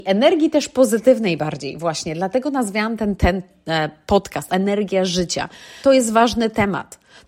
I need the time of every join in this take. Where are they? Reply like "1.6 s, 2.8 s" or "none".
3.2 s, 4.5 s, 5.8 s